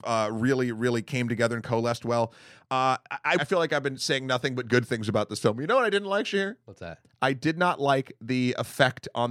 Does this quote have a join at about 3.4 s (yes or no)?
yes